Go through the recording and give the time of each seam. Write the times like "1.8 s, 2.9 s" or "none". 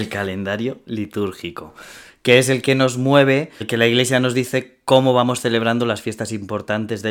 3.6 s